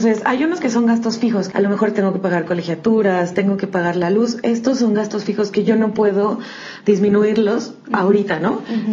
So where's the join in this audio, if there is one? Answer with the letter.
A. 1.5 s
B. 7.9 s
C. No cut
A